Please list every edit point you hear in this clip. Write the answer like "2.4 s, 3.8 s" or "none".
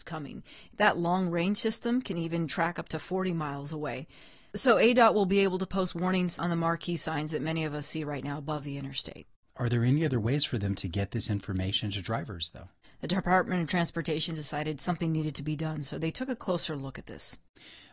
12.8 s

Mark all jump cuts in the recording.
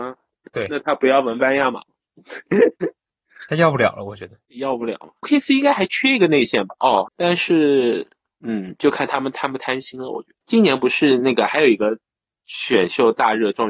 7.1 s

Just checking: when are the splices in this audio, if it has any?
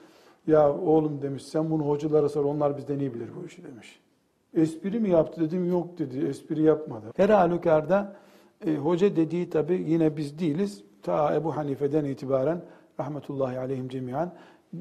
7.1 s

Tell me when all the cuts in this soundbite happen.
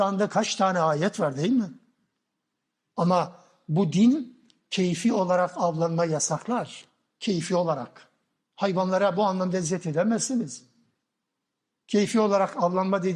8.4 s

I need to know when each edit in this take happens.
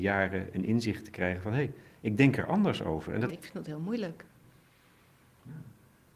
3.3 s

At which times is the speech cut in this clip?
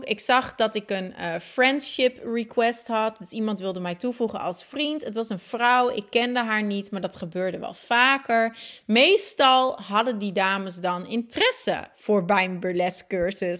none

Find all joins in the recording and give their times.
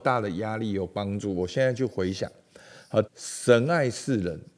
3.0 s

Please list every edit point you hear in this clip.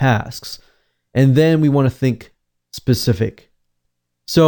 none

